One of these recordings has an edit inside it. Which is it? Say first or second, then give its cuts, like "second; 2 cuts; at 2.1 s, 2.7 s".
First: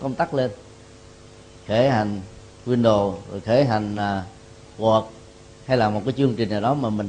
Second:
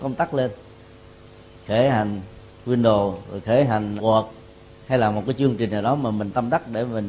second; 1 cut; at 4.0 s